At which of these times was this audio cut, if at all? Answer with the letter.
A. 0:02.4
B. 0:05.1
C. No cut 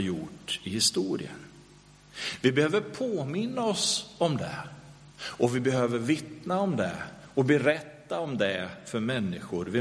B